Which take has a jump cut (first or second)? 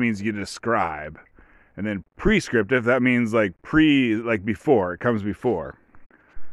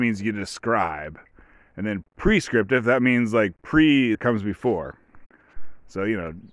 second